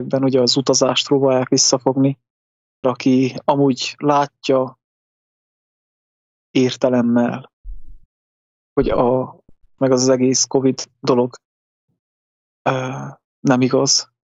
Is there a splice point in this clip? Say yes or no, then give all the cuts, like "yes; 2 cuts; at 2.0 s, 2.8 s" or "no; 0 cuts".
yes; 2 cuts; at 2.8 s, 9.8 s